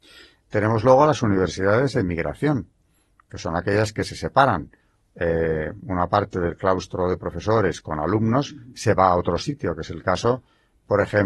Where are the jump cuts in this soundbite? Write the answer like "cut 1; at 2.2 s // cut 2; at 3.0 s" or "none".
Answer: none